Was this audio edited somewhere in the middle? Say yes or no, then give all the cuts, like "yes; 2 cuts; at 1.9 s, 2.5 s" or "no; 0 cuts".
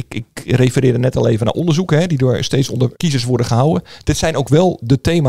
yes; 1 cut; at 2.9 s